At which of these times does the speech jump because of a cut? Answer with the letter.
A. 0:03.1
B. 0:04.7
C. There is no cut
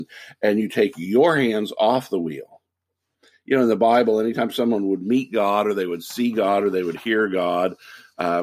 C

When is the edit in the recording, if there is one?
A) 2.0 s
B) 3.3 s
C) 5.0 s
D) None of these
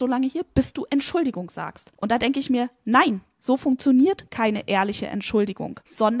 D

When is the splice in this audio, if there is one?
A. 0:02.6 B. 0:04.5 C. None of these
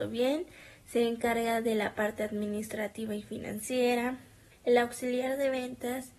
B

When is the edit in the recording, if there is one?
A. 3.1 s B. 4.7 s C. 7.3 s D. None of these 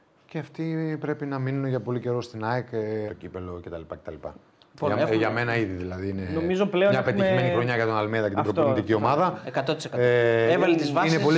A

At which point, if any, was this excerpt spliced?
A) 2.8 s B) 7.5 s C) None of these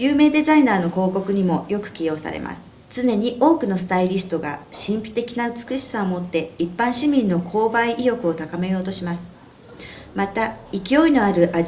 A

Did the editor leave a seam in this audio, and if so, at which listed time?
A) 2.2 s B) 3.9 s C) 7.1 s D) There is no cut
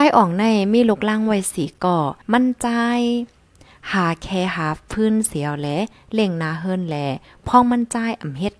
A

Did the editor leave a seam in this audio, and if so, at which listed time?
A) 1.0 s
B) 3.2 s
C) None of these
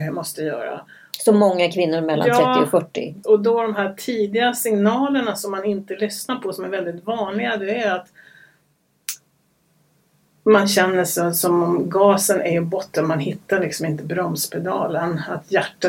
B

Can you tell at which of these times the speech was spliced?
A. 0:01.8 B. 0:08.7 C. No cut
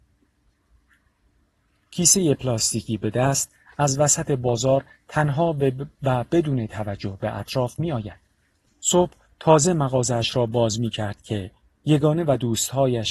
B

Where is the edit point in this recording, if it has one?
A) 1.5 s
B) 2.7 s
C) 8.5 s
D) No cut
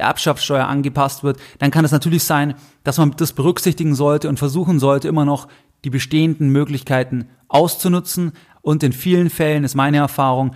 C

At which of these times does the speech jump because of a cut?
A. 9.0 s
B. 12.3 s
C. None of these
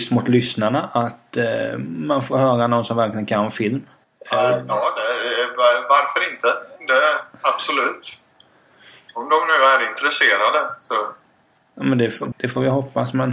B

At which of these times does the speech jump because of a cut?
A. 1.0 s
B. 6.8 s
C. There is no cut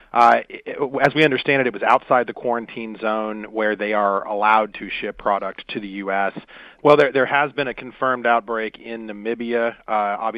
B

